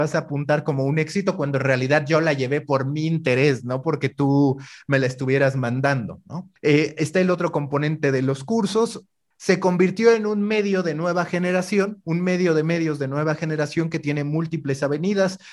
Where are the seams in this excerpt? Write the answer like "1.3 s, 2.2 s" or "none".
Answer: 6.6 s, 9.3 s